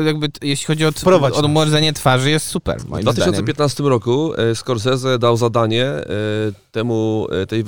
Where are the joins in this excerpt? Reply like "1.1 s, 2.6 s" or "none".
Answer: none